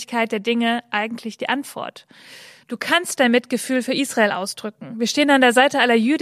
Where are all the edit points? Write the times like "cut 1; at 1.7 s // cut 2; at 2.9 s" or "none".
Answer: cut 1; at 2.6 s